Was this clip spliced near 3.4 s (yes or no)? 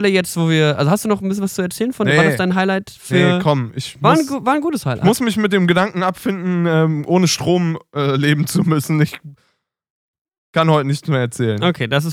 no